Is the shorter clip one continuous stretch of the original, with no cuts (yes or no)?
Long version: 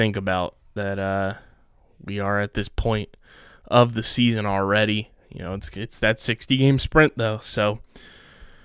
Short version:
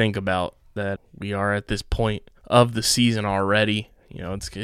no